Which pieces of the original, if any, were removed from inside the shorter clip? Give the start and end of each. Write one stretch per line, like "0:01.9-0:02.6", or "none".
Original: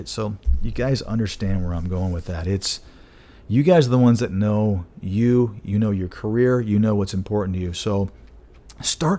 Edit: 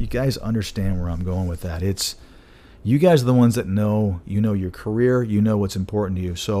0:04.9-0:05.6